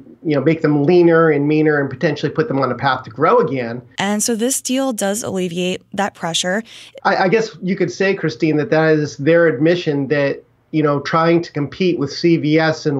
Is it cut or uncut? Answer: cut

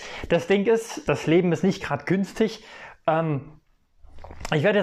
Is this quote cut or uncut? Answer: uncut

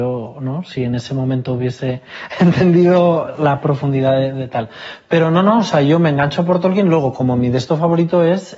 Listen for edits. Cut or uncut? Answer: uncut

